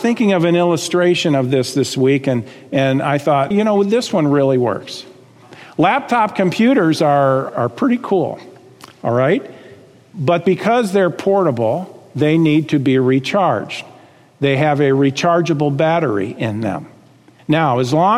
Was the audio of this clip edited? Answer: yes; 1 cut; at 3.5 s

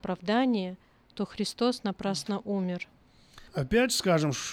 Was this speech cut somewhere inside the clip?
yes; 1 cut; at 3.5 s

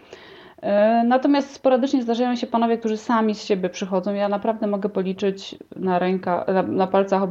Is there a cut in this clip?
no; 0 cuts

